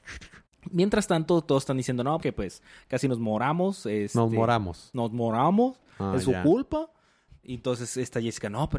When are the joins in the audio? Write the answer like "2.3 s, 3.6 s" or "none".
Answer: 2.2 s